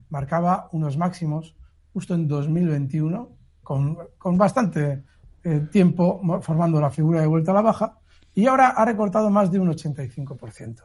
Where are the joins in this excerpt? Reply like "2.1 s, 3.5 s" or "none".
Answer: 3.6 s